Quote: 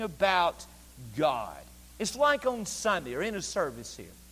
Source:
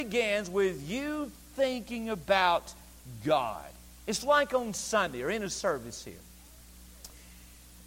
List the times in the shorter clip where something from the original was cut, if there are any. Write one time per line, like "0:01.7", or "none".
none